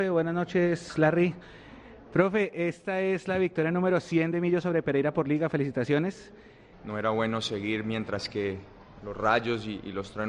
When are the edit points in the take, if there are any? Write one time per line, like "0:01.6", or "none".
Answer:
0:06.7
0:09.0